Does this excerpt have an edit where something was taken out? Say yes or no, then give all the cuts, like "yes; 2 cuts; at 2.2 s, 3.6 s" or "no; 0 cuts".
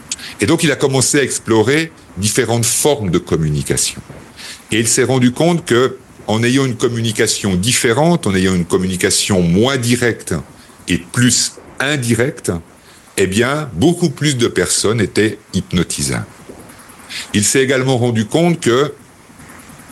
no; 0 cuts